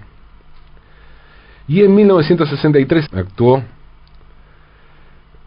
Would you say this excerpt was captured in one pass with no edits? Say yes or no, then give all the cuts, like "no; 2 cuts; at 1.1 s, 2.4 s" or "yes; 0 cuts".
no; 1 cut; at 3.1 s